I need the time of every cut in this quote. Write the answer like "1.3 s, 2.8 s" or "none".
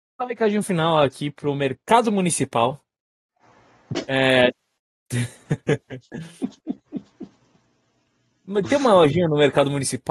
none